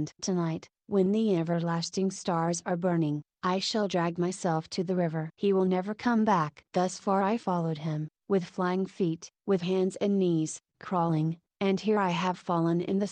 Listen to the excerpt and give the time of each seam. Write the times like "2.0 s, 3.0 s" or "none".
9.3 s, 11.5 s